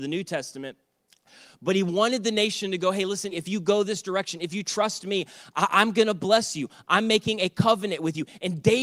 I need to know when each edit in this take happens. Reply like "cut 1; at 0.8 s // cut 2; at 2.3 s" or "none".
cut 1; at 3.3 s // cut 2; at 6.9 s